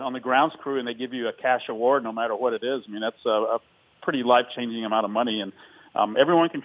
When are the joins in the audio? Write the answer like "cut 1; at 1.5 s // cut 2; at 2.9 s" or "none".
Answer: none